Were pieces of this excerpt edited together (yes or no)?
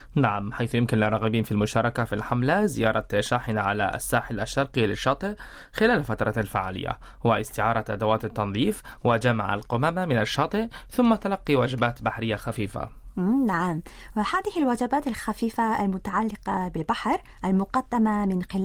no